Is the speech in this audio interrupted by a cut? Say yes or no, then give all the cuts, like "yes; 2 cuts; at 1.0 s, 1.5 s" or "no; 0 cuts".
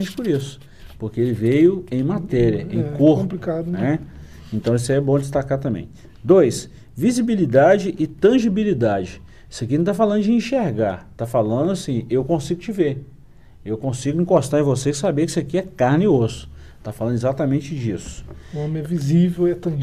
no; 0 cuts